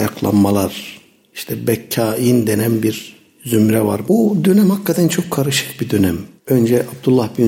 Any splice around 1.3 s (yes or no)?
no